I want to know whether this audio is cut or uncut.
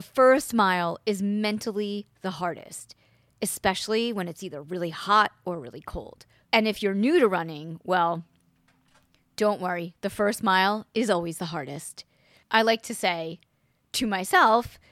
uncut